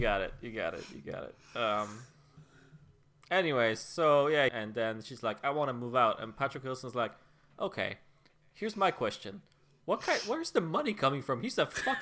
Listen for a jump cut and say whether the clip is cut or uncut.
cut